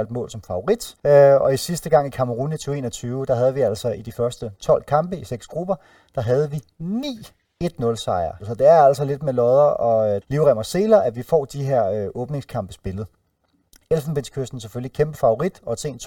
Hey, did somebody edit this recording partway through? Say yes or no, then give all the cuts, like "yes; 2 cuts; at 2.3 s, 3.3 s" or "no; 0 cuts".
yes; 3 cuts; at 1.0 s, 8.4 s, 10.2 s